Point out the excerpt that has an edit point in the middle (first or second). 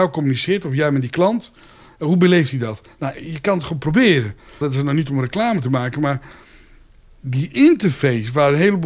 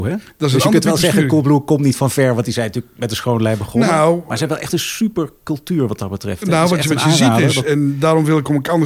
first